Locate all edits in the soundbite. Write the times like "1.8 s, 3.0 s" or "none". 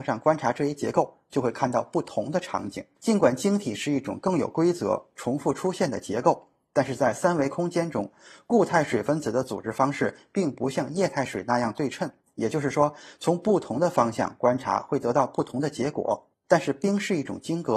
3.0 s, 16.3 s